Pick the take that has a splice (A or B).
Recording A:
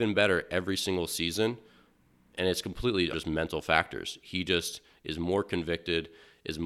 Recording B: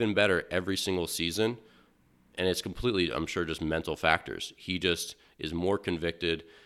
A